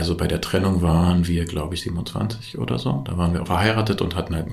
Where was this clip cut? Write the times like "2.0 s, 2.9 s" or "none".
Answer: 1.8 s, 3.5 s